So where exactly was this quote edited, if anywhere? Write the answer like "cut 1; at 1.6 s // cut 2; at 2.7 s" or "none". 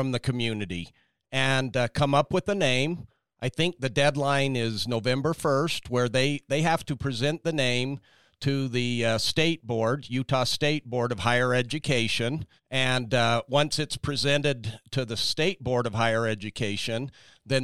cut 1; at 12.6 s